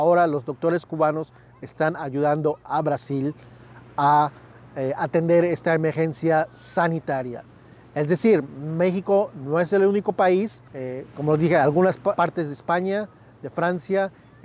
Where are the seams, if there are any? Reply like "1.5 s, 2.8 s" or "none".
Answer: 10.7 s, 12.2 s

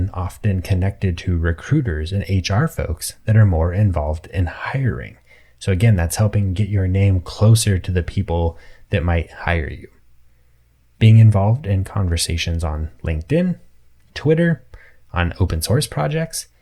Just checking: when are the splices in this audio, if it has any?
none

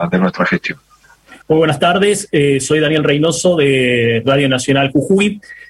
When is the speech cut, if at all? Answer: 1.4 s

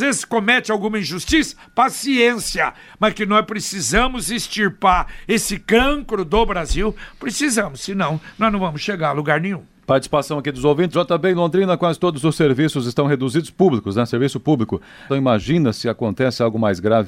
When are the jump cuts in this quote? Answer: 10.9 s, 15.1 s

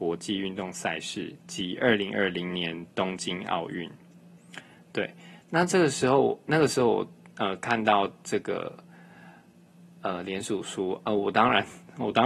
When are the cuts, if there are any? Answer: none

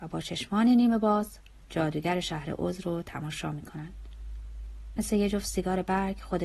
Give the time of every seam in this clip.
none

